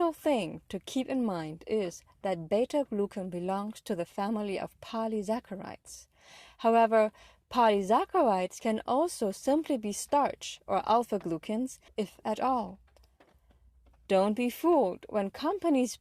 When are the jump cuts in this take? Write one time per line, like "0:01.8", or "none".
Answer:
0:11.9